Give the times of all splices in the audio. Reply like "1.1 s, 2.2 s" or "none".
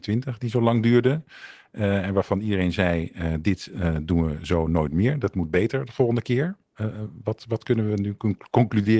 none